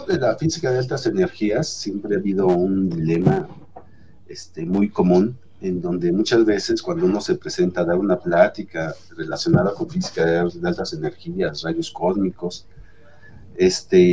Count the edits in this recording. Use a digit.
0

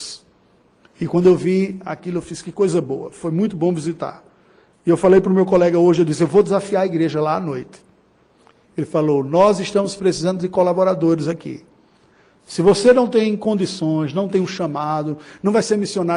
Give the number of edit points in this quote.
0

